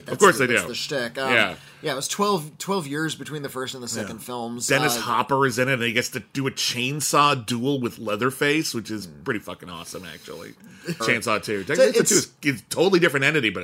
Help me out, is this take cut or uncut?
cut